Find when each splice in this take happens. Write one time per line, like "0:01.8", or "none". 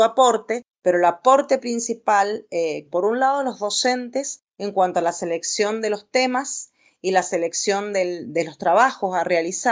0:02.9

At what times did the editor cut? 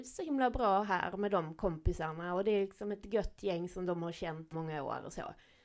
0:04.5

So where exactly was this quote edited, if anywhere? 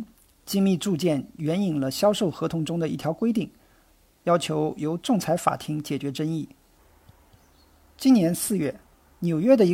none

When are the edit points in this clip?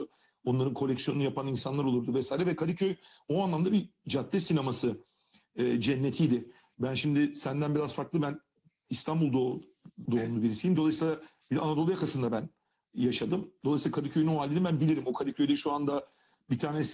0:10.1

